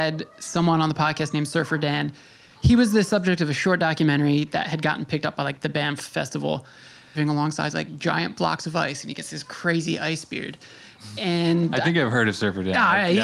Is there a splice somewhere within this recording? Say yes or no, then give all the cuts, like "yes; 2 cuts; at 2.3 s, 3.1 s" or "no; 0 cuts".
yes; 1 cut; at 7.1 s